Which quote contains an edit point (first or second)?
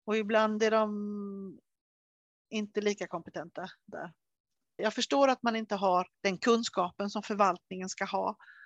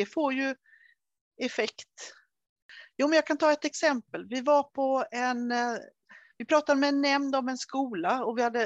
first